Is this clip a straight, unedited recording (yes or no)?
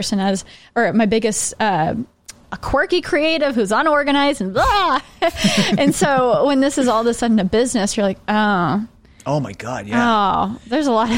no